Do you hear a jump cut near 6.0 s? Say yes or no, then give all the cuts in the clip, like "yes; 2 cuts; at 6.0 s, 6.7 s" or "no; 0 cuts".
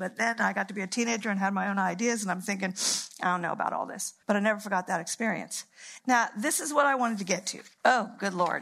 yes; 2 cuts; at 4.2 s, 6.0 s